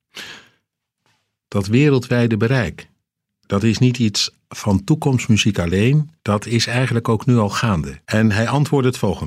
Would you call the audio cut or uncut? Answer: cut